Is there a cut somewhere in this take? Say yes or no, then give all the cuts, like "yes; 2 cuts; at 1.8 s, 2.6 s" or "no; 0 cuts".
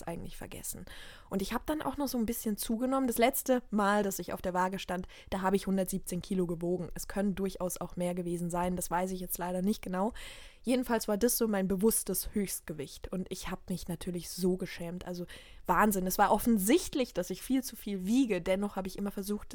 no; 0 cuts